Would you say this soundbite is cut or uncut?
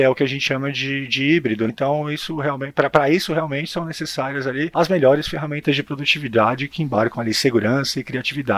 cut